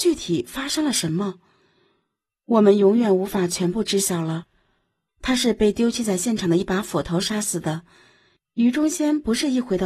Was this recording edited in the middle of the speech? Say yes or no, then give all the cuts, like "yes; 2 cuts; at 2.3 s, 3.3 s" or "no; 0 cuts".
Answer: yes; 2 cuts; at 5.1 s, 8.4 s